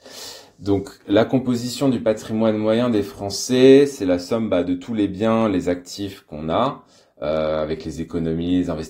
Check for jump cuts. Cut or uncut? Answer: uncut